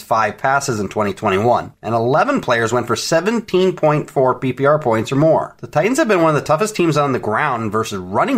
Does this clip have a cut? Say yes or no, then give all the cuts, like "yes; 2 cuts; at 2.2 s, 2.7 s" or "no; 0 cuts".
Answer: no; 0 cuts